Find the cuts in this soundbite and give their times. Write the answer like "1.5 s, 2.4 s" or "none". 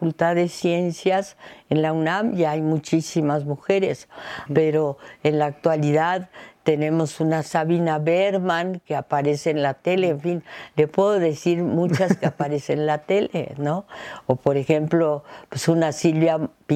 4.5 s